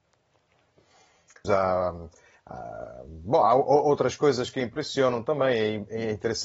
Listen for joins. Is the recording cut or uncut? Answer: cut